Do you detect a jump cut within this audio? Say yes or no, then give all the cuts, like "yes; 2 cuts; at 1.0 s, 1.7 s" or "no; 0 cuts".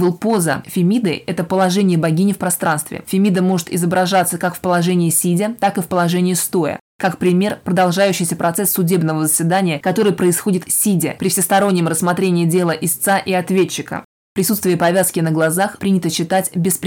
yes; 2 cuts; at 6.9 s, 14.2 s